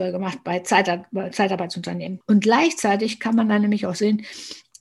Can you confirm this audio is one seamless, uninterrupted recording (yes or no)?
no